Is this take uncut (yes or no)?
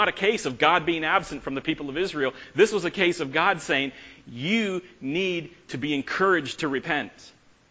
yes